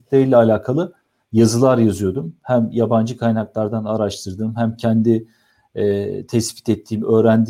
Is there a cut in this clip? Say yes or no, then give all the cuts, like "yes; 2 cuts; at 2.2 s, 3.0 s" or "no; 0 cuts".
no; 0 cuts